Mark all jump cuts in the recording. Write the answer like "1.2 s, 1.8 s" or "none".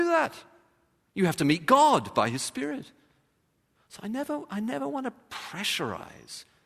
none